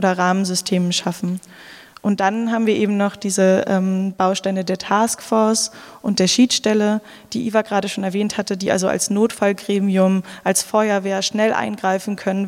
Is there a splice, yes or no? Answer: no